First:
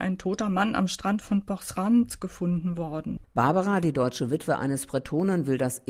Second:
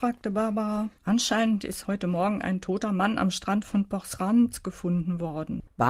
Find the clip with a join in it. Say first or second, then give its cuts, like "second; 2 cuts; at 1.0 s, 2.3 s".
second; 1 cut; at 1.0 s